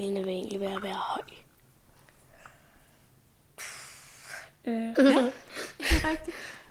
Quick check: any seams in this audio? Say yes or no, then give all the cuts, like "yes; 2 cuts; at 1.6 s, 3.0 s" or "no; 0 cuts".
yes; 1 cut; at 5.0 s